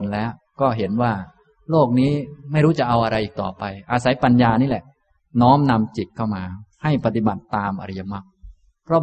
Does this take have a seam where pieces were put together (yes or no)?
no